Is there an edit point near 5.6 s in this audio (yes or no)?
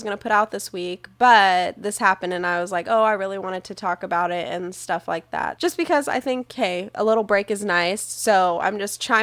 yes